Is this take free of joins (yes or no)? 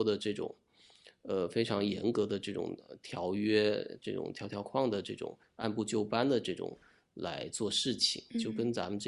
no